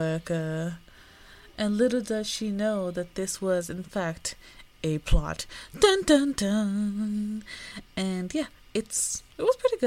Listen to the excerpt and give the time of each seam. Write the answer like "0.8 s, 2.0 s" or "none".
none